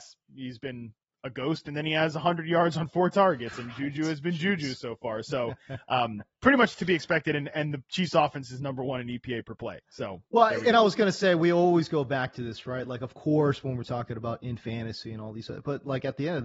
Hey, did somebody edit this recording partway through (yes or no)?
no